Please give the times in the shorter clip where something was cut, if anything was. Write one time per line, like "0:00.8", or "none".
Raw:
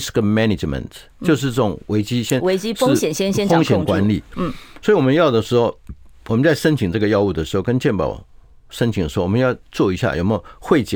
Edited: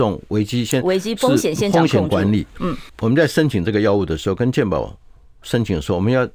0:01.6
0:02.9